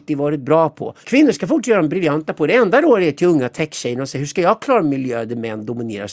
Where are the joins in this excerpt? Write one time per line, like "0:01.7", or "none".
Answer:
0:01.0